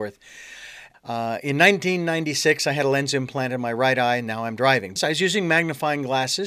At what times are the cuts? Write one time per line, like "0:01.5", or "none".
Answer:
0:00.9
0:05.0

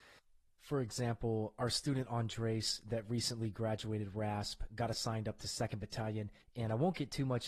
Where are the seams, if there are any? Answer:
0:06.4

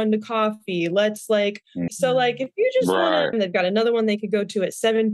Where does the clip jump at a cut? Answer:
0:01.9
0:03.3

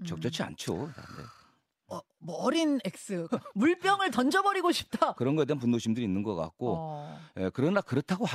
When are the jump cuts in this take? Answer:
0:03.3
0:05.1

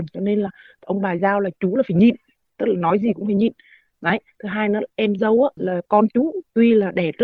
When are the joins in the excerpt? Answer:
0:05.6

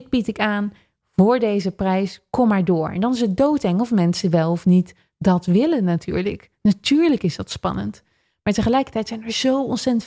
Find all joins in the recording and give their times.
none

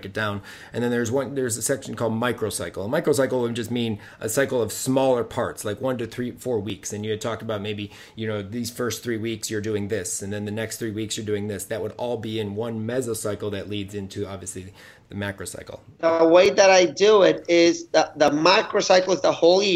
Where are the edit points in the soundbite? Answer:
none

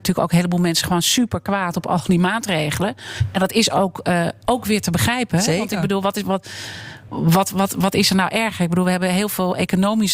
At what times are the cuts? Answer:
none

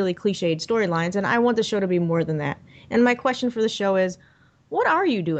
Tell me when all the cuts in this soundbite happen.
none

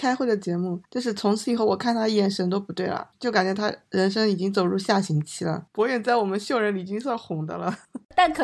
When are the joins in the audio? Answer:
0:05.7

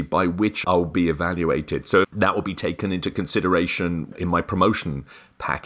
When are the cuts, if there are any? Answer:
0:02.0

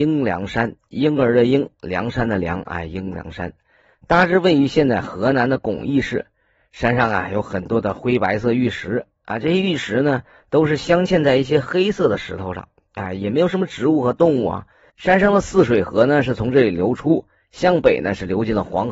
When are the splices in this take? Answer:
0:14.9

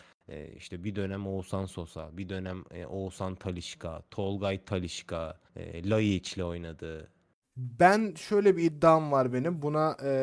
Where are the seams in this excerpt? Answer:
0:05.5
0:07.4

